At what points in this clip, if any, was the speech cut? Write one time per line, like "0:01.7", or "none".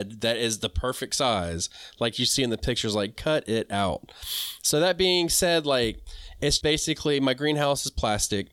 0:03.2
0:06.6